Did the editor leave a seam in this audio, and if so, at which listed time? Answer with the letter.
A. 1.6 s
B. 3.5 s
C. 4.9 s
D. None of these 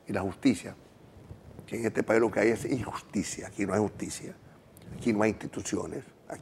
D